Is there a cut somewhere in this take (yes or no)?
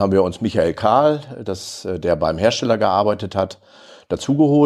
no